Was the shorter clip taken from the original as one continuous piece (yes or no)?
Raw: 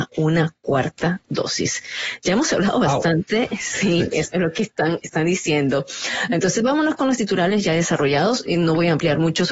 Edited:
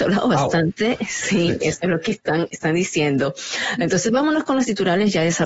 yes